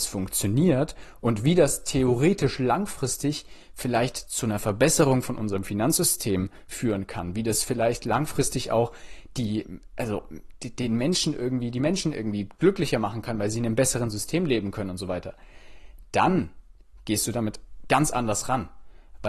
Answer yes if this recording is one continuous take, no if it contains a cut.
yes